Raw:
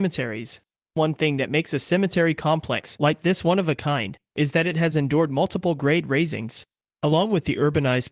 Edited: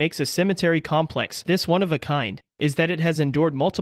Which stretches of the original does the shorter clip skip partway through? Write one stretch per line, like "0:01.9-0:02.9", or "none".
0:03.0-0:03.2